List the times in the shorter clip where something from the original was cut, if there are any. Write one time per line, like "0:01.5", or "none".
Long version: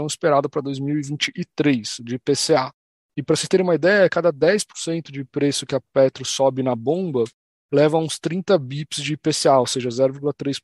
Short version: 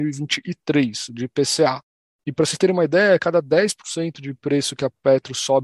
none